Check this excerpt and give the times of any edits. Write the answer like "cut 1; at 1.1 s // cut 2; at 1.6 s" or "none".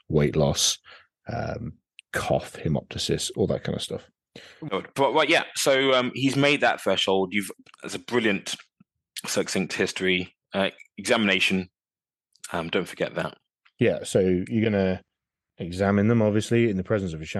none